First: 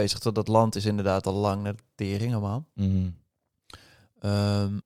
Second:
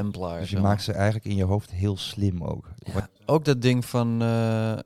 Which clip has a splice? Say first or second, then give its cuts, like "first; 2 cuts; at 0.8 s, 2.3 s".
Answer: second; 1 cut; at 3.2 s